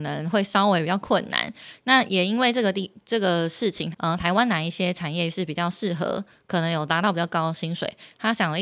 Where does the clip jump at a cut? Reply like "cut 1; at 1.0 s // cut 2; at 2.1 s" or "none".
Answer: cut 1; at 2.1 s // cut 2; at 3.9 s